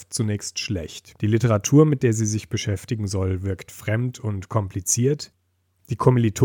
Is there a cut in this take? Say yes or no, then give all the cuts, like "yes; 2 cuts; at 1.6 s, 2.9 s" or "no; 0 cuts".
yes; 1 cut; at 1.2 s